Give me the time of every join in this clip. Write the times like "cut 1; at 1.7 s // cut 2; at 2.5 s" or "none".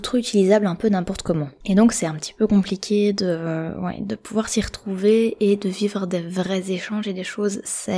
cut 1; at 1.6 s